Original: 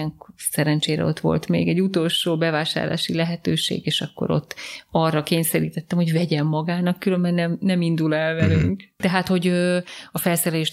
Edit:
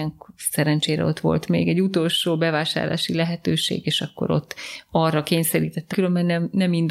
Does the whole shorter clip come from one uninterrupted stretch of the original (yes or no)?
no